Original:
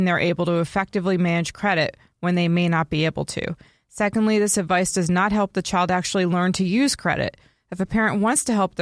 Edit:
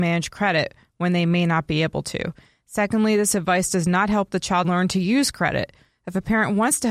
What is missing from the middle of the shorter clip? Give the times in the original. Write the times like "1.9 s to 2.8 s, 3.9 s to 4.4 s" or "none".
5.9 s to 6.3 s